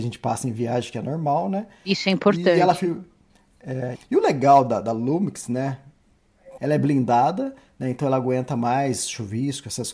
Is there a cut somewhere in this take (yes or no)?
yes